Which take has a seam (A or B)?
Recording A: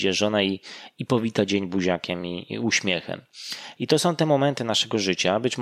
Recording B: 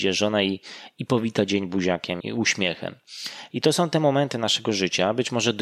B